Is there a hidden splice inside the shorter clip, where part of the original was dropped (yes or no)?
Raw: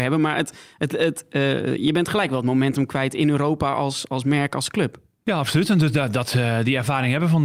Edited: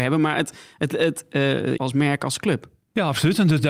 yes